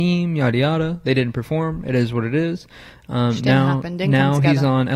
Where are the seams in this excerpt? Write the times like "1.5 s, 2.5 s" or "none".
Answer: none